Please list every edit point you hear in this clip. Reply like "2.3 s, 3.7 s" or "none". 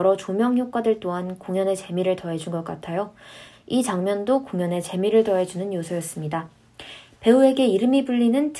3.5 s

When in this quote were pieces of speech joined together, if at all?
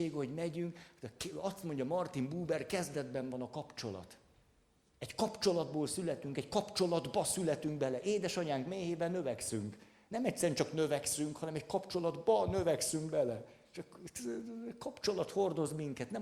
none

